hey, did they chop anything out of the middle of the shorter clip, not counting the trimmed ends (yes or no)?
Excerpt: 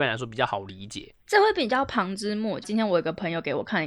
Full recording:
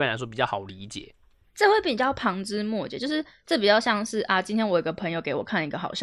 yes